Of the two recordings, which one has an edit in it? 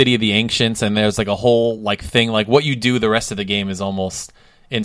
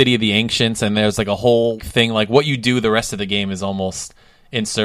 second; 1 cut; at 1.8 s

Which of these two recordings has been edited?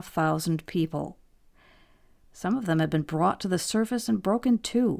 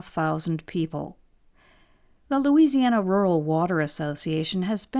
first; 1 cut; at 2.2 s

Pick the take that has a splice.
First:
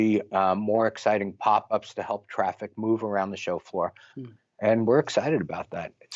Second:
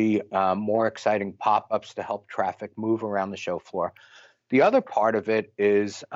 first; 1 cut; at 4.1 s

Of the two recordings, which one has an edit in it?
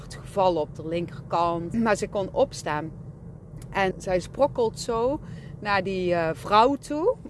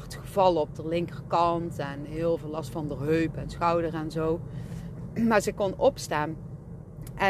first; 2 cuts; at 1.7 s, 3.9 s

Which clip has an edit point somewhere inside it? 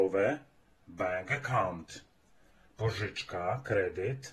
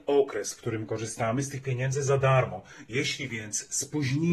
second; 1 cut; at 2.9 s

